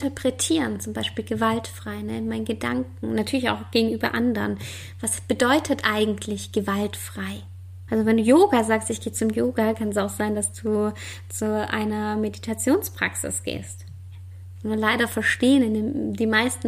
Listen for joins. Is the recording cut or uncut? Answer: cut